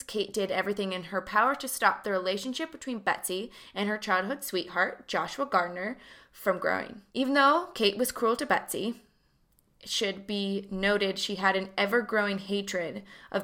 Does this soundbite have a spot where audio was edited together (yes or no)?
yes